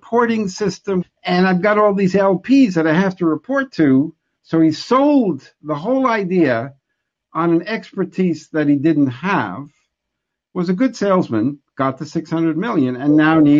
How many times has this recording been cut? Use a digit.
1